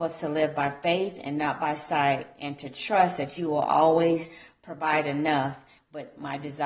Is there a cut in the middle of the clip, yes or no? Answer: yes